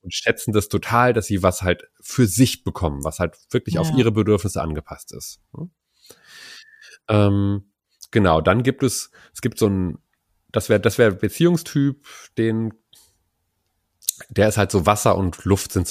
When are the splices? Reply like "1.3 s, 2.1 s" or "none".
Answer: none